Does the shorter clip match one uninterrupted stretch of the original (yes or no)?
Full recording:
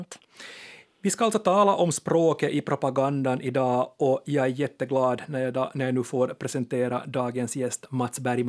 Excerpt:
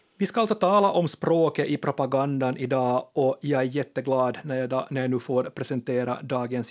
yes